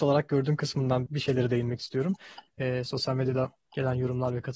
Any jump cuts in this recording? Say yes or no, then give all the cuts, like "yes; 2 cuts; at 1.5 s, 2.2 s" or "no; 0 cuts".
yes; 2 cuts; at 1.1 s, 2.5 s